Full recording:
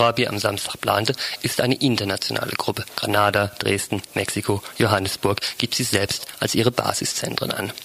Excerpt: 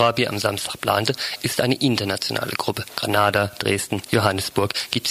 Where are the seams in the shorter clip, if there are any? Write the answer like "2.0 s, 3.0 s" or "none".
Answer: 4.1 s

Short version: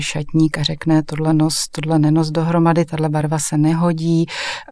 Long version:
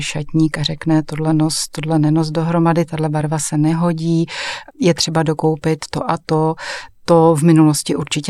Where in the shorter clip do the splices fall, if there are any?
none

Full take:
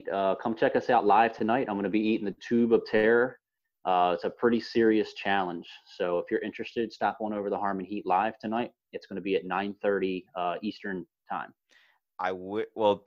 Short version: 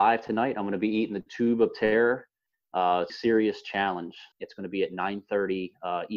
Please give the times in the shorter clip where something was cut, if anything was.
3.1 s, 4.3 s

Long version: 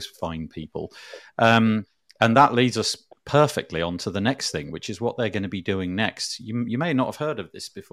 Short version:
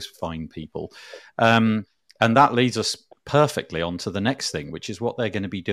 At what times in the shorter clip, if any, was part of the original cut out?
none

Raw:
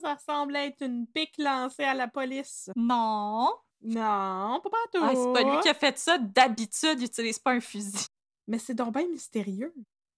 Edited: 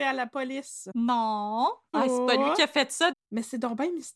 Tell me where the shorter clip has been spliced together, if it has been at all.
1.9 s, 3.1 s

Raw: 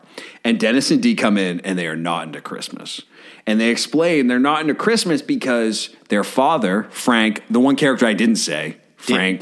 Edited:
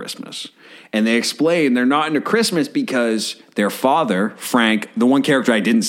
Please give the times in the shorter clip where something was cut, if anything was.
none

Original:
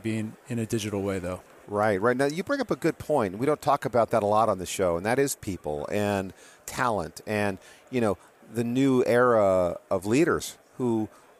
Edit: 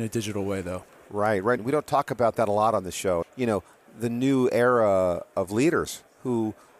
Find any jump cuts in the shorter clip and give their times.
1.6 s, 3.2 s

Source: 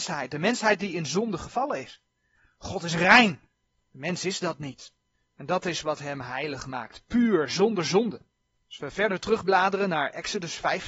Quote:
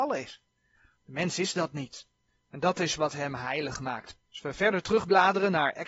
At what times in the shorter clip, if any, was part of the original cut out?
1.0 s, 4.2 s

